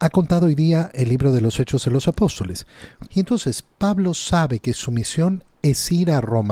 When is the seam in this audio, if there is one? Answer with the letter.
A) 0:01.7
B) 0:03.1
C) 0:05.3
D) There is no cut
B